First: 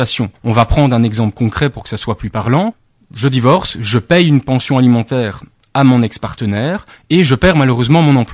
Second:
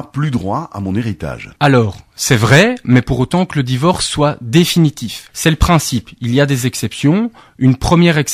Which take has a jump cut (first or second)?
second